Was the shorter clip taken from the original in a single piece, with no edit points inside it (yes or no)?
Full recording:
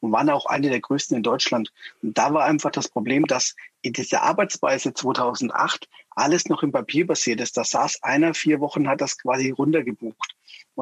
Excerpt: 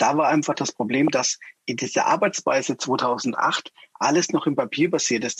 yes